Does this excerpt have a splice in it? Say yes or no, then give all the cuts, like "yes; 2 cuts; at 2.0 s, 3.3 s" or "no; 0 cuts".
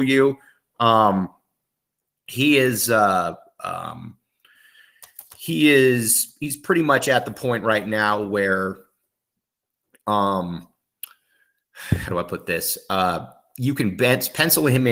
no; 0 cuts